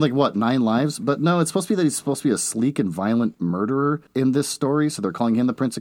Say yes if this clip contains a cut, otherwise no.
no